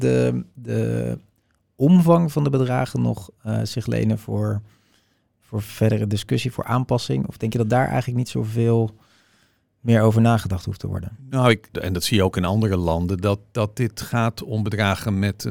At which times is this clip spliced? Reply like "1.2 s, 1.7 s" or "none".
11.7 s